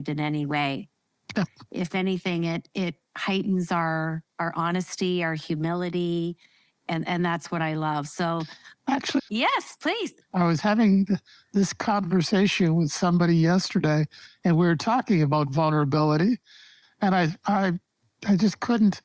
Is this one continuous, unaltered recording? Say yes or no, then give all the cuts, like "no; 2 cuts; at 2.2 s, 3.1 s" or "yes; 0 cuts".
no; 2 cuts; at 9.2 s, 16.8 s